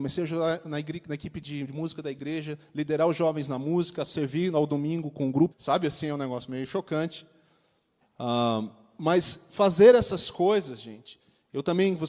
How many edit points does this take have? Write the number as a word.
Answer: two